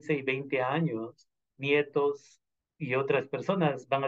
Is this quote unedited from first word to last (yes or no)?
no